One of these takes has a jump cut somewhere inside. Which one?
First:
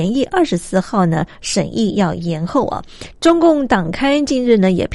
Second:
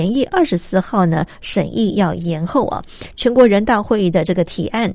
first; 1 cut; at 3.1 s

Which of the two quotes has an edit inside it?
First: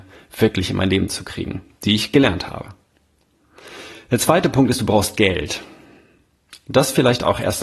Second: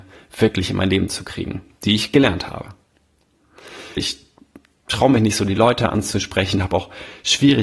second; 1 cut; at 4.0 s

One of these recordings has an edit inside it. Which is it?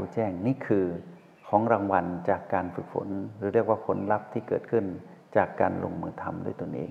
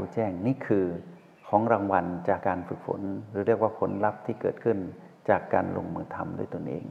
second; 1 cut; at 2.4 s

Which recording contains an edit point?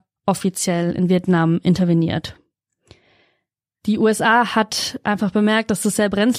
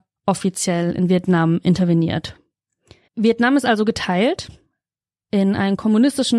second; 1 cut; at 3.1 s

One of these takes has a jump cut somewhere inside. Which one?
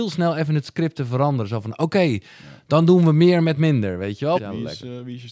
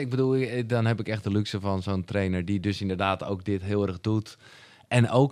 first; 1 cut; at 4.4 s

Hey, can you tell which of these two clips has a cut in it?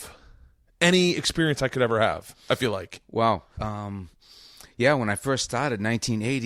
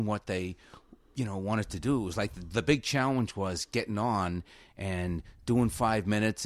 first; 1 cut; at 3.6 s

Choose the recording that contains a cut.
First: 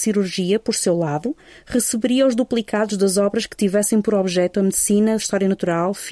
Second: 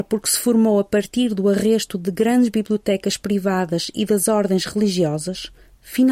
first; 1 cut; at 5.2 s

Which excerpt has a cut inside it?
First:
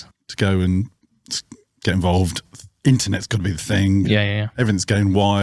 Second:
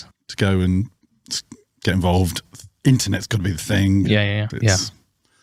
second; 1 cut; at 4.5 s

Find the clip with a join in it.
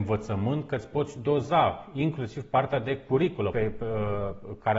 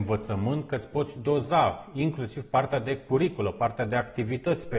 first; 1 cut; at 3.5 s

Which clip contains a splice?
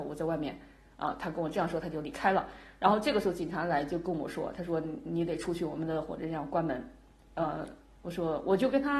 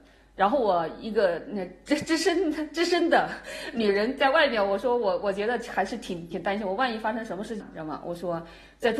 second; 2 cuts; at 6.3 s, 7.6 s

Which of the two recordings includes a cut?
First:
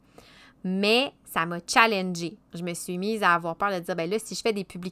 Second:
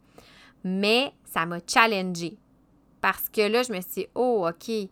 first; 1 cut; at 2.5 s

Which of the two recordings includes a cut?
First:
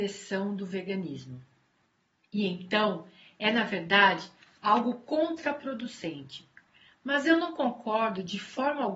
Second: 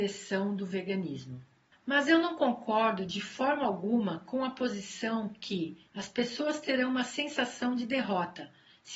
second; 2 cuts; at 1.7 s, 5.9 s

